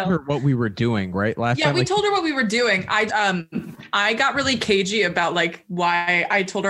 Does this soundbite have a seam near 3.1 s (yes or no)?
yes